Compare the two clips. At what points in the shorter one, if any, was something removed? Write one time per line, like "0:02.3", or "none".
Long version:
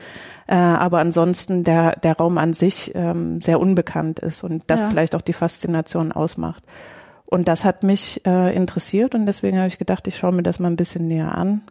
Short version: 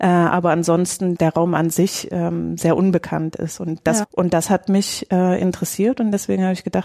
0:01.2
0:04.0